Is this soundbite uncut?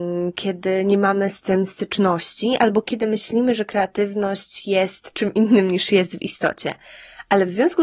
yes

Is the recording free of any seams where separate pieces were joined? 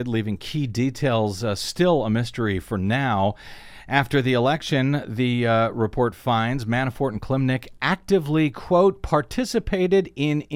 yes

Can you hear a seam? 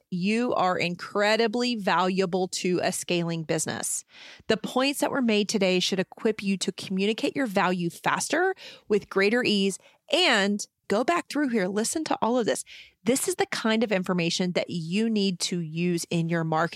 yes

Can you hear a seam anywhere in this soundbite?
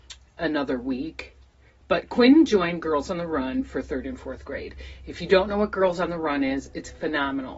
no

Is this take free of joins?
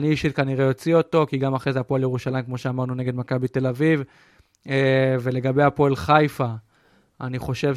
yes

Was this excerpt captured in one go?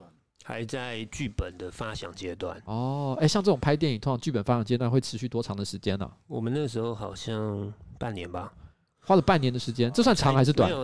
yes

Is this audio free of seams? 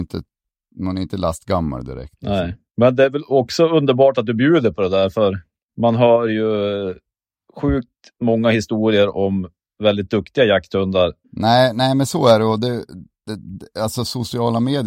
no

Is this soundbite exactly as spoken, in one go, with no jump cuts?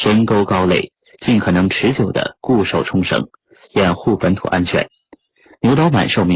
yes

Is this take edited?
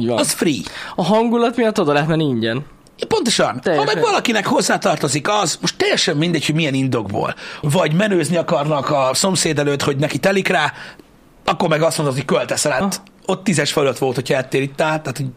yes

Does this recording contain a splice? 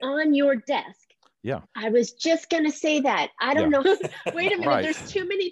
yes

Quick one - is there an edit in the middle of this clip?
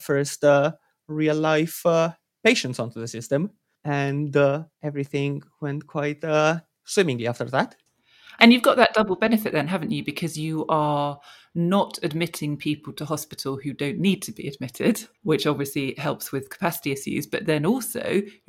yes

